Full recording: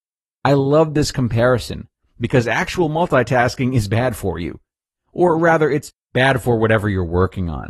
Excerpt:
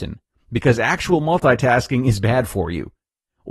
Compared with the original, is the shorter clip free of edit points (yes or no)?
yes